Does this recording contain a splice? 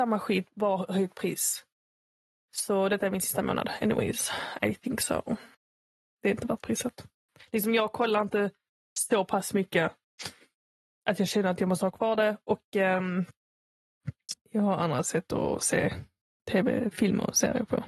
no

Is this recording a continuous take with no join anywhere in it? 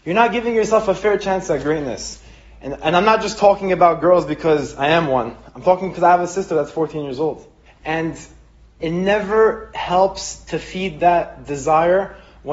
no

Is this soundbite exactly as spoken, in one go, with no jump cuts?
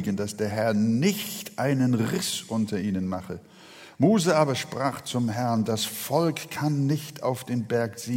yes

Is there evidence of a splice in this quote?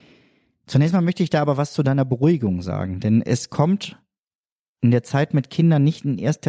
no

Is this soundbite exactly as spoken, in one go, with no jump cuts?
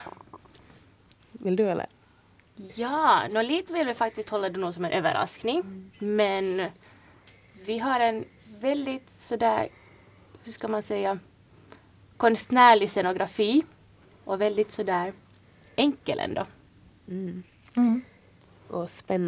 yes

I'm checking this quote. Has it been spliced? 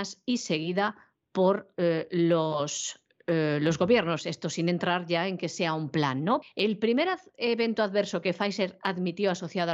yes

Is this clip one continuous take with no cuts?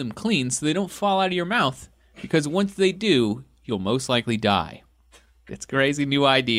no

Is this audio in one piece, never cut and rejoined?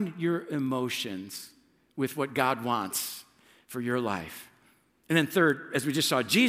yes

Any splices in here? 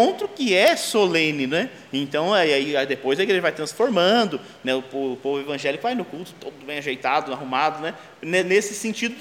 no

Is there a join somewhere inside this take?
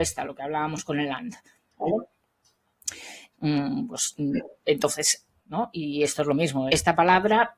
yes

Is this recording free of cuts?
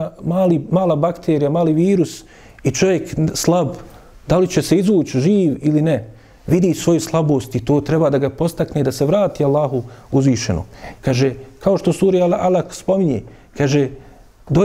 no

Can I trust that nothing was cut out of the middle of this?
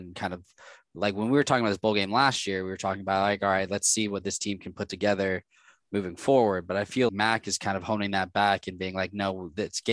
no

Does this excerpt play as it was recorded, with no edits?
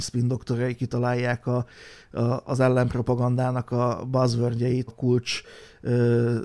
no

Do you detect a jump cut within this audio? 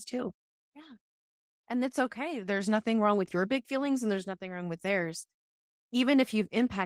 no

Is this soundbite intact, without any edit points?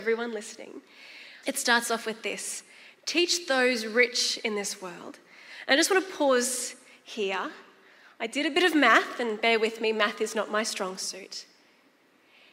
no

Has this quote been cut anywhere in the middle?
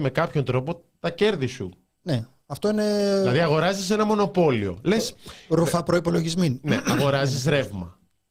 no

